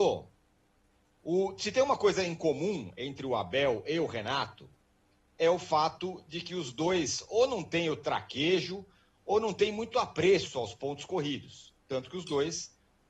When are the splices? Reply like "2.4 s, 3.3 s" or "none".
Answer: none